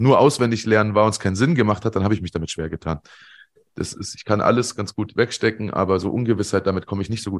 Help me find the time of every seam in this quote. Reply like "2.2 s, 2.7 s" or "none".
3.6 s